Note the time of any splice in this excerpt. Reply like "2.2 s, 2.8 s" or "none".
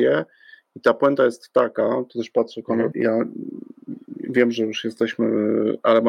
2.9 s